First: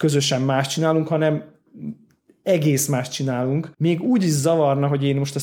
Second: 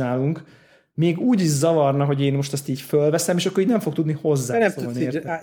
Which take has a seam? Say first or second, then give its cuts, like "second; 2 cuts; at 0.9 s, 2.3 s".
first; 1 cut; at 3.7 s